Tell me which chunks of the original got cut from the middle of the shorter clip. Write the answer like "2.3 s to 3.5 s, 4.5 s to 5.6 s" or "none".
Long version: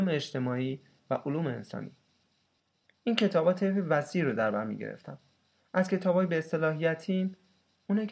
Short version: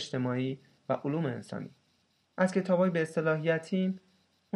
2.5 s to 5.7 s